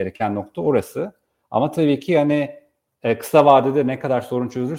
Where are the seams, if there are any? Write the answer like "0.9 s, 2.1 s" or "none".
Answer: none